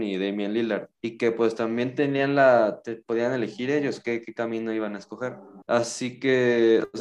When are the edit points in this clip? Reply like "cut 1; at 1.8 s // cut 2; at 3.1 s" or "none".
cut 1; at 0.9 s // cut 2; at 5.6 s